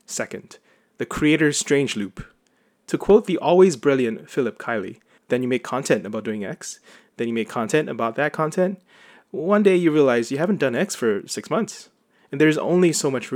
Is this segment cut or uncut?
cut